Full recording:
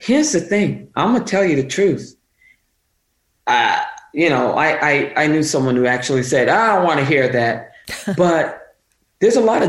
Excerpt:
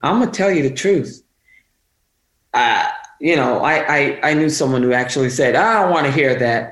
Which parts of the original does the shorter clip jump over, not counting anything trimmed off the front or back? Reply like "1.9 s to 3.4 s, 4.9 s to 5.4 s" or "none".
none

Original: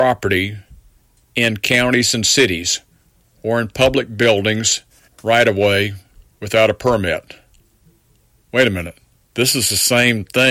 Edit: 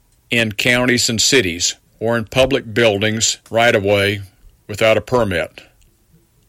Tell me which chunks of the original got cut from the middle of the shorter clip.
2.9 s to 3.3 s, 4.9 s to 5.1 s

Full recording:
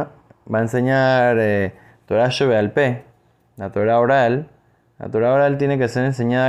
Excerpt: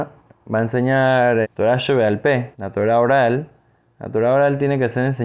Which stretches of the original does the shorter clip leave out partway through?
1.4 s to 1.9 s, 3.0 s to 3.5 s

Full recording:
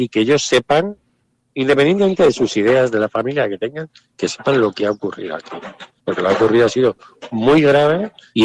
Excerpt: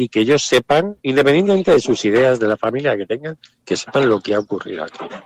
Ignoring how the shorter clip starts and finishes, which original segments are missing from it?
1.0 s to 1.5 s

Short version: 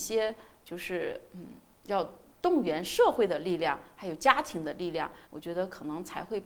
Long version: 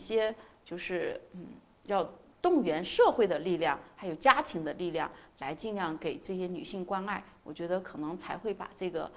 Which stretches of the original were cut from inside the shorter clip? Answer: 5.3 s to 7.4 s

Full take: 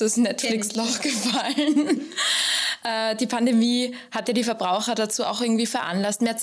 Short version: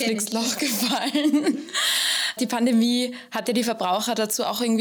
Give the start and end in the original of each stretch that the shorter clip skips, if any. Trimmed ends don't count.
2.8 s to 3.2 s

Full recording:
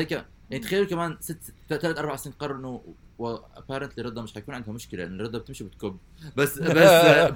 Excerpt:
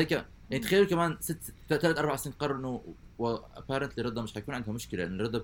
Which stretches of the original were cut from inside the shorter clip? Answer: none

